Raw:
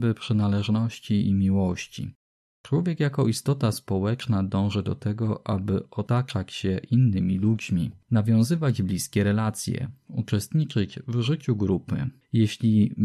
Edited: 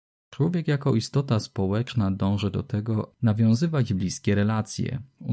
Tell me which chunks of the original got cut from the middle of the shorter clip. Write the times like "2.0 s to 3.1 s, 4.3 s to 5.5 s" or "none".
5.4 s to 8.0 s